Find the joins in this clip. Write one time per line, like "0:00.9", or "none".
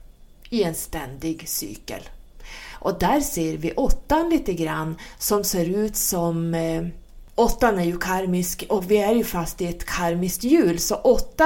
0:08.7